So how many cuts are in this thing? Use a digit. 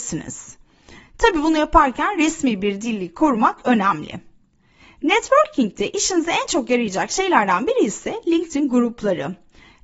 1